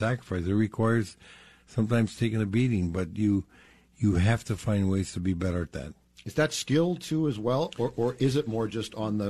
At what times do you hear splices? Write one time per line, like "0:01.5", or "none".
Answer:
none